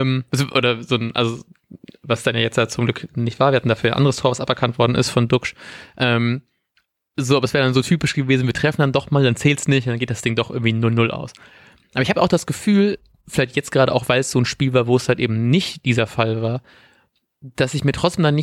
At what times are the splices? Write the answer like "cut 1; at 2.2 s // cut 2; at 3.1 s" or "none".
none

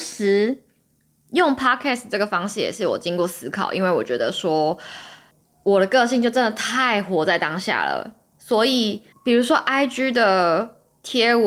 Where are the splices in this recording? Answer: none

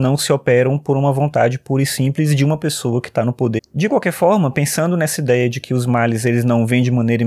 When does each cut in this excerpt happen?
cut 1; at 3.6 s

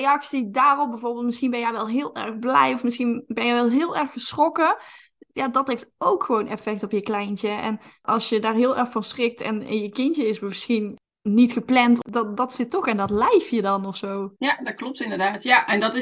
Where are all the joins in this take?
cut 1; at 14.4 s

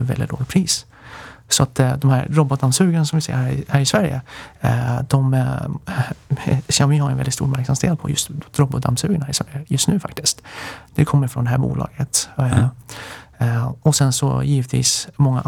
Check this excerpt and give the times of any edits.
none

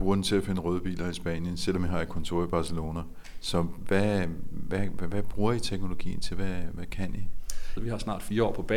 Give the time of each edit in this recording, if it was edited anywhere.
cut 1; at 7.8 s

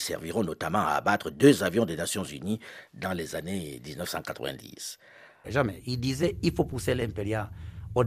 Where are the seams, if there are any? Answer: cut 1; at 5.4 s

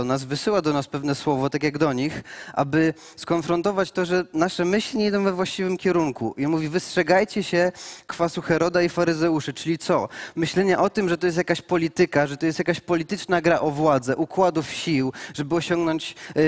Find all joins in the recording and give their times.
none

